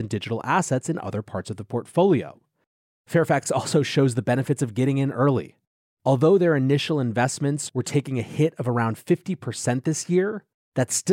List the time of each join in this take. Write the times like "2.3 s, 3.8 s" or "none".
none